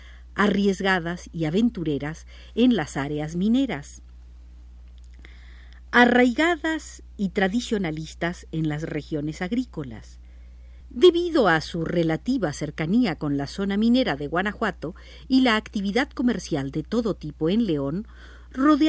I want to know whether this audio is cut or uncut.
cut